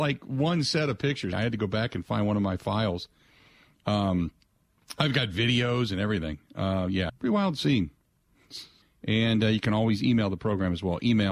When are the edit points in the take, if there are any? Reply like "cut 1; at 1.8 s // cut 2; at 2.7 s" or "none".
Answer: cut 1; at 1.3 s // cut 2; at 7.1 s // cut 3; at 8.8 s